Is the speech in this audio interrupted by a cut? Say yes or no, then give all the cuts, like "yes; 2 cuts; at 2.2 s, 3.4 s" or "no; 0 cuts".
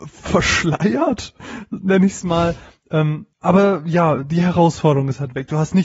yes; 1 cut; at 3.3 s